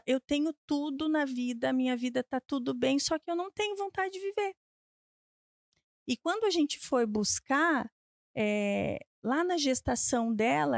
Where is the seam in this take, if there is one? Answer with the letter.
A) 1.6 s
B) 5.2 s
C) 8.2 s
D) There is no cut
D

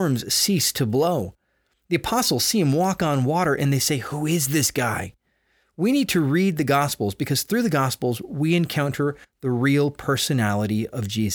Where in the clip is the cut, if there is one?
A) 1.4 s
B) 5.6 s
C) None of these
C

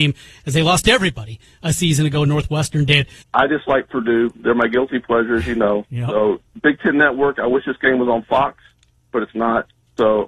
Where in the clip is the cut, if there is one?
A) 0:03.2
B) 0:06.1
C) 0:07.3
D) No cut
A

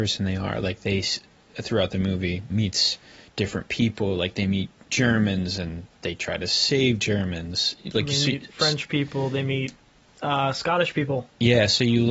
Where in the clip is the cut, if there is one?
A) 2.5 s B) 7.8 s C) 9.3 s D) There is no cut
A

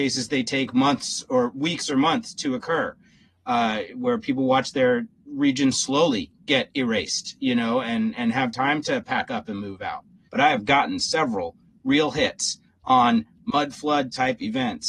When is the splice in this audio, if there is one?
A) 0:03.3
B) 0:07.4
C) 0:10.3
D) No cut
C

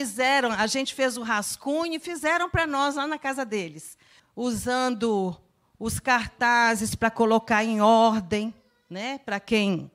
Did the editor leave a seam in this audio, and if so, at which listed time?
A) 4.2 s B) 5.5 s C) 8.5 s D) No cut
A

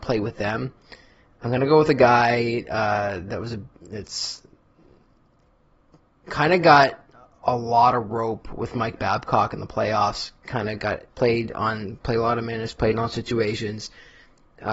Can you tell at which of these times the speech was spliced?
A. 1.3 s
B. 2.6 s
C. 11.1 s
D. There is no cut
C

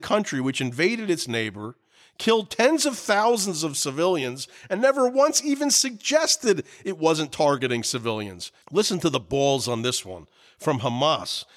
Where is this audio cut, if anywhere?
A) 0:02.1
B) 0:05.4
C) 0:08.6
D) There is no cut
C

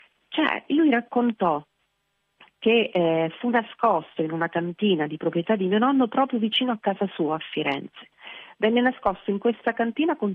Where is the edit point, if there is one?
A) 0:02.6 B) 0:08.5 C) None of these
C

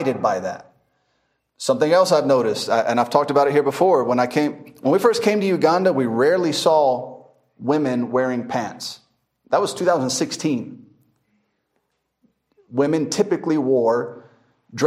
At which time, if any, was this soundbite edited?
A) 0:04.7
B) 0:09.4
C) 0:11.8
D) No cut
D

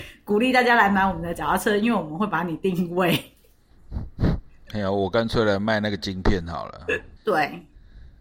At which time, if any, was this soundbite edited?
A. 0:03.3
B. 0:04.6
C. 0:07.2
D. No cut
C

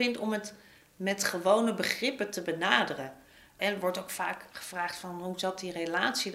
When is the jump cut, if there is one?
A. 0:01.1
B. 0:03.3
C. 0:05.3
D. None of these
D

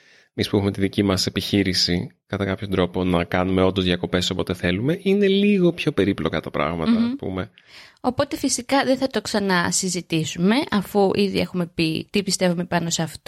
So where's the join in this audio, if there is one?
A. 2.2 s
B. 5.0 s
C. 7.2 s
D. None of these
D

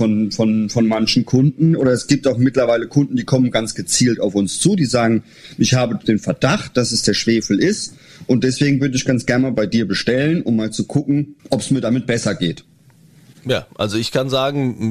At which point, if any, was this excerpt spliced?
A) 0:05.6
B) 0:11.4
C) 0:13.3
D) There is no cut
B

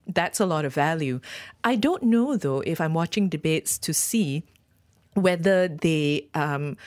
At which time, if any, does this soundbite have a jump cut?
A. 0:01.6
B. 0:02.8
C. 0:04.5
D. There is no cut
D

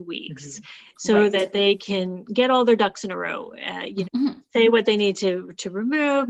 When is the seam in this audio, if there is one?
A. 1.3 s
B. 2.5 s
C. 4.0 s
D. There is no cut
C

